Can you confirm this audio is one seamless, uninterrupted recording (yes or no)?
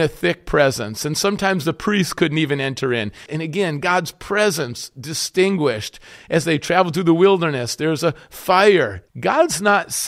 no